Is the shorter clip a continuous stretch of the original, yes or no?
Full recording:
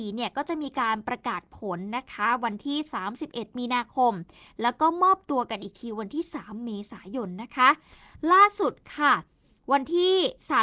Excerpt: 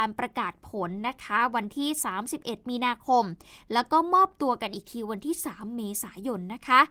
yes